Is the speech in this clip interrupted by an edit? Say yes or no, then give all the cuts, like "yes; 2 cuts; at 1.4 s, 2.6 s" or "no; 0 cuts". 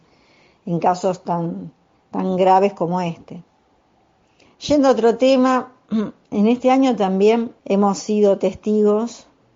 yes; 2 cuts; at 4.4 s, 7.6 s